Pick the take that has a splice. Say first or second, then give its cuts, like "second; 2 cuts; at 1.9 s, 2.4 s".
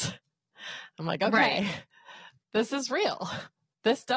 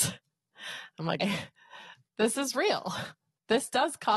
second; 1 cut; at 1.2 s